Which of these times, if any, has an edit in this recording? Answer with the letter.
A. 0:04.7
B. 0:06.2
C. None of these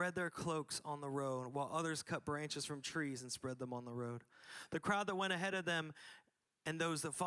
C